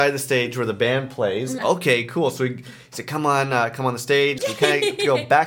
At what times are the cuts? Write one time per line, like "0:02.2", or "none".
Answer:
0:01.6
0:04.4